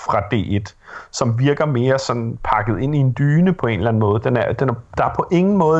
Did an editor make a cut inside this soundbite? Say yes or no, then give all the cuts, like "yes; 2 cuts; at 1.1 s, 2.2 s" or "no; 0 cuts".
no; 0 cuts